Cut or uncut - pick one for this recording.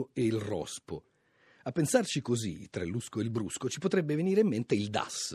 uncut